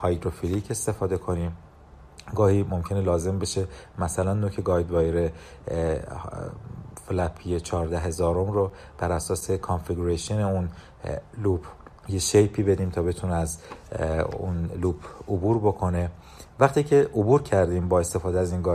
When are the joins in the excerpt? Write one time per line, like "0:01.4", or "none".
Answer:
0:12.0